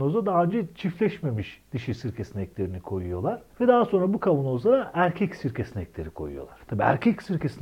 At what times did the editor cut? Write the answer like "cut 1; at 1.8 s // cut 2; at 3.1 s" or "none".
none